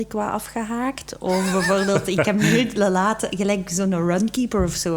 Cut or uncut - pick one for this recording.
uncut